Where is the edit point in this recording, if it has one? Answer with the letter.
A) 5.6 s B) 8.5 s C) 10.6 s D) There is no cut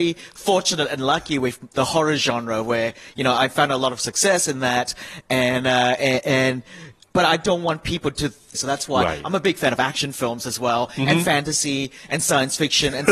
B